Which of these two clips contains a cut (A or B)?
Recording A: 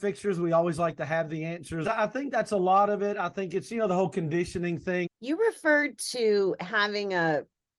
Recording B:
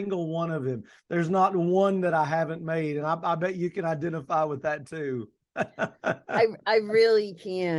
A